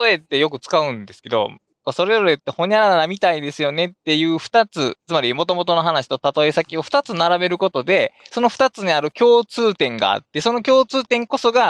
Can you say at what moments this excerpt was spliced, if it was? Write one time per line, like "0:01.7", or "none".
0:01.8